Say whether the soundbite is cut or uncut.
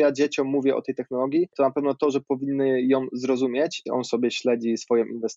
cut